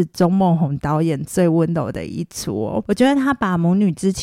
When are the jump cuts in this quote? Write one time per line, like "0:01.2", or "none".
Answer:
none